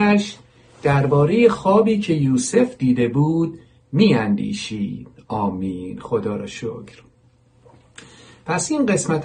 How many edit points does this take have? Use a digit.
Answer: 0